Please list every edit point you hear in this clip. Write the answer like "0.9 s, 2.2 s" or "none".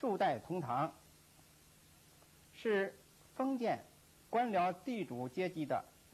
none